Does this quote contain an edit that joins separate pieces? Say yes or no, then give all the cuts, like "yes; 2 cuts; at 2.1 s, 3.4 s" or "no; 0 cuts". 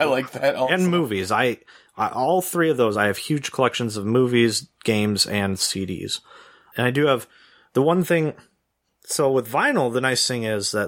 no; 0 cuts